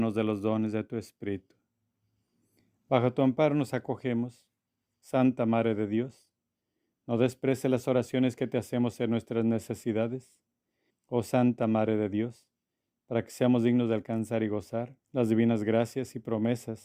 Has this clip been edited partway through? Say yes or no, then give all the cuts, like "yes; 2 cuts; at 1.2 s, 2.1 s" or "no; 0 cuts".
yes; 2 cuts; at 10.9 s, 15.0 s